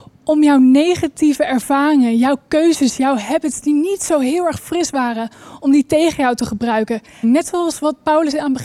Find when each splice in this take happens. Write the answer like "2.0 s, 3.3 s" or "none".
7.2 s